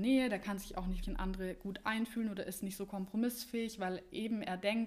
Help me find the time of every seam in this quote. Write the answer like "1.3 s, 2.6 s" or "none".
1.0 s